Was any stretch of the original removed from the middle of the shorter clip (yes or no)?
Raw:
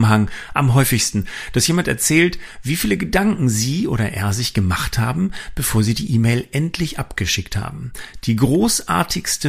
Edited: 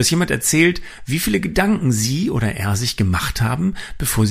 no